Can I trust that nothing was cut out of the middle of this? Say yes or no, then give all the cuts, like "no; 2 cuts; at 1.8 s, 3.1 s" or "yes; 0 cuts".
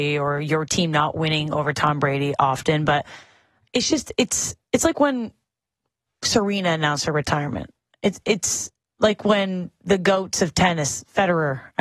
yes; 0 cuts